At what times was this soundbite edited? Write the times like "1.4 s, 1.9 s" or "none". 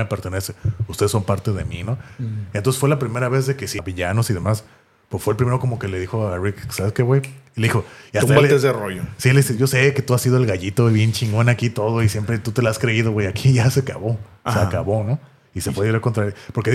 3.8 s